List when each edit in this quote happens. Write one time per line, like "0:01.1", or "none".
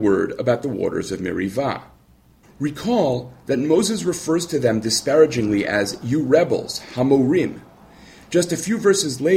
0:02.4